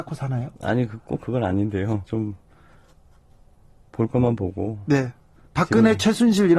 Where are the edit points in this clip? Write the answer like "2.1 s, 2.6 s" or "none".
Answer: 2.0 s, 5.4 s